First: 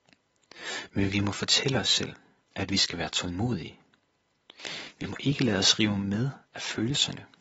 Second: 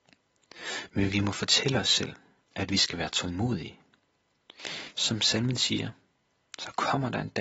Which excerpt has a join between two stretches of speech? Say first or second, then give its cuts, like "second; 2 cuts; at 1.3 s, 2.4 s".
second; 1 cut; at 4.9 s